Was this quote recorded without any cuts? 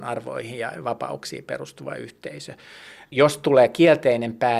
no; 1 cut; at 3.1 s

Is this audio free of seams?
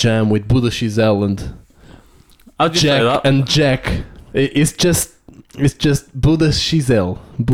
no; 1 cut; at 4.3 s

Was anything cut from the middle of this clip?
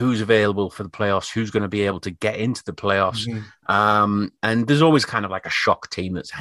no; 0 cuts

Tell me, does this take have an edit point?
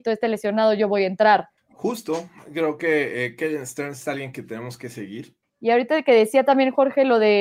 yes; 2 cuts; at 1.6 s, 5.4 s

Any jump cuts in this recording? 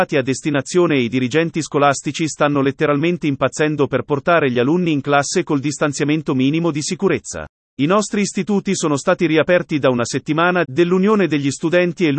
yes; 2 cuts; at 7.6 s, 10.6 s

